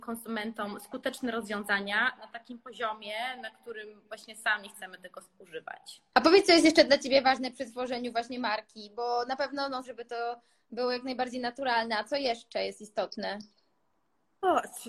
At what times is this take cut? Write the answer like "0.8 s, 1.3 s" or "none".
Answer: 6.1 s, 9.8 s